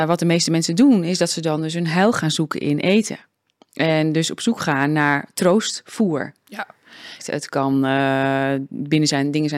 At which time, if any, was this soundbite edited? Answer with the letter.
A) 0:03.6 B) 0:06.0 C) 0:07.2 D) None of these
C